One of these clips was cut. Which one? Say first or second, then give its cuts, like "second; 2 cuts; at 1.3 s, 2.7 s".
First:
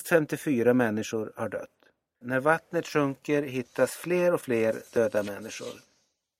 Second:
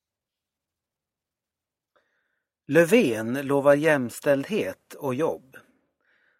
first; 1 cut; at 2.2 s